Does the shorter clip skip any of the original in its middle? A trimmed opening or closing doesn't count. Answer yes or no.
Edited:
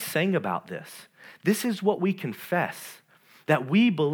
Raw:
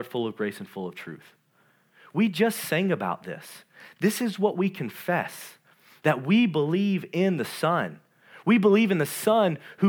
no